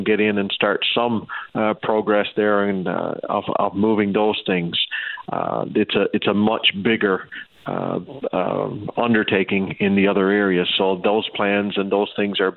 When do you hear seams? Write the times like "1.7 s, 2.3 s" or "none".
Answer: none